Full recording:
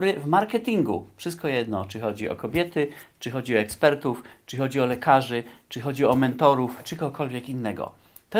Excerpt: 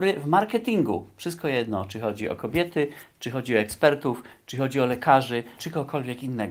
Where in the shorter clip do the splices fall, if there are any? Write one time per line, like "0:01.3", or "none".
0:05.6